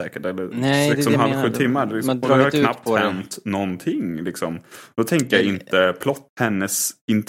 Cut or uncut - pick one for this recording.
cut